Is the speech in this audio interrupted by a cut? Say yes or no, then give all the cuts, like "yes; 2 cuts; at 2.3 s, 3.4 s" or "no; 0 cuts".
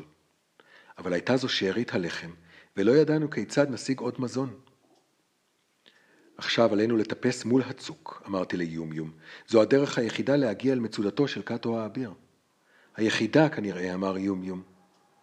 no; 0 cuts